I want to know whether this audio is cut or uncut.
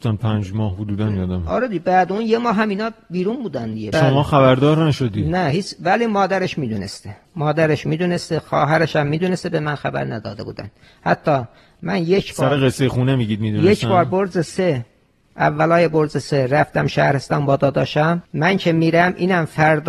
cut